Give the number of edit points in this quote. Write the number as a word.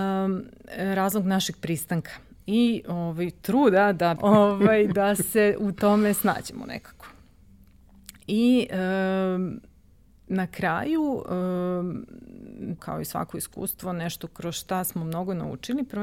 two